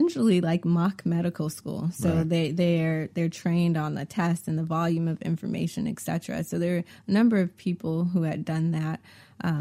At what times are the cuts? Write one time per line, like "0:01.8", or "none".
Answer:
none